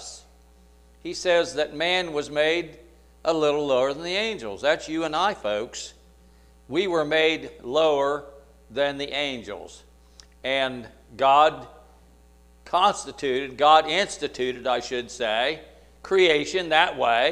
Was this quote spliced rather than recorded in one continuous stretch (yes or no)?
no